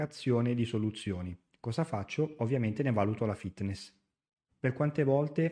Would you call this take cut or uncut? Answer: cut